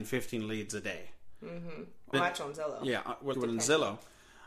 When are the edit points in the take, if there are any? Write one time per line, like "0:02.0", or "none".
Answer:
0:02.1
0:03.3